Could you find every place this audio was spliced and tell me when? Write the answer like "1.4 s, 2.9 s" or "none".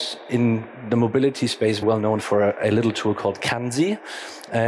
1.8 s